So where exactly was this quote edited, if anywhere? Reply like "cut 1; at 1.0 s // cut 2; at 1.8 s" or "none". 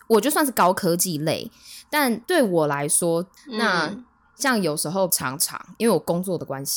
cut 1; at 3.4 s // cut 2; at 5.1 s